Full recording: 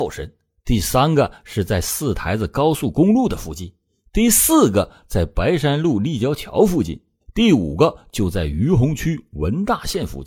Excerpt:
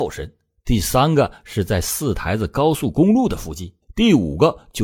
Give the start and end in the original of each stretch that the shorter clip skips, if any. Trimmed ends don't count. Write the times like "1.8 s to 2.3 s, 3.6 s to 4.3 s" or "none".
3.8 s to 7.2 s